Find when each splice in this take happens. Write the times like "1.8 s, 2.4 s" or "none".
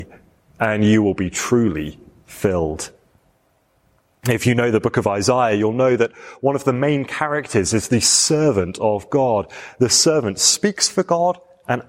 none